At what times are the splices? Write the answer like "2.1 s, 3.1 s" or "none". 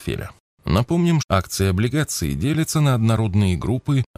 1.2 s